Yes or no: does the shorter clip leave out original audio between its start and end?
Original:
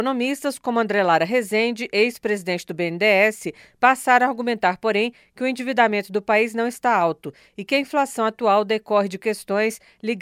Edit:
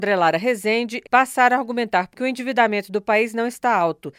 yes